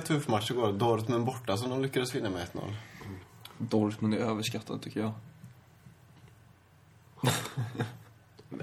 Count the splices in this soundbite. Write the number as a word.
two